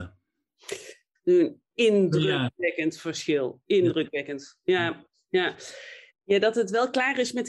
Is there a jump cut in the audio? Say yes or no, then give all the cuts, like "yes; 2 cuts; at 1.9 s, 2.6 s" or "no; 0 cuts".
yes; 2 cuts; at 1.2 s, 6.1 s